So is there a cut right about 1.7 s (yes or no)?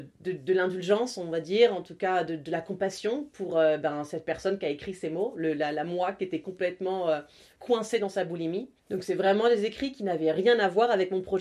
no